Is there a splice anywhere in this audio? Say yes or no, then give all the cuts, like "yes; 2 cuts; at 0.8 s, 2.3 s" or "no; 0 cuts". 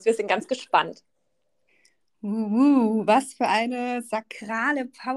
no; 0 cuts